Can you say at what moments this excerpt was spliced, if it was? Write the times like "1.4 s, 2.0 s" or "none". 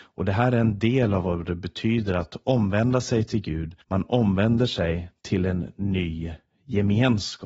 3.8 s